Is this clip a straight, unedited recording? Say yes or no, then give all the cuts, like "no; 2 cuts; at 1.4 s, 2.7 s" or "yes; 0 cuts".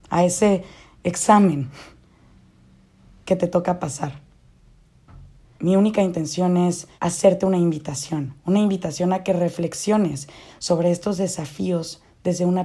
no; 3 cuts; at 5.6 s, 7.0 s, 8.4 s